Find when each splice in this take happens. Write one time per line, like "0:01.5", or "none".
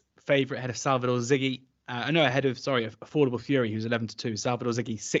none